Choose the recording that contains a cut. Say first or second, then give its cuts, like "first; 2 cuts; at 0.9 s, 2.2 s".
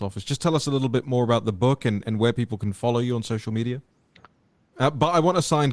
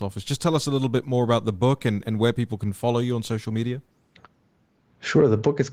first; 1 cut; at 4.7 s